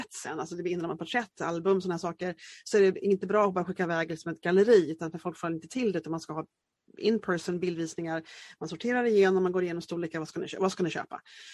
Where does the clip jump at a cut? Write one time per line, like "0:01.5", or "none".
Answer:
none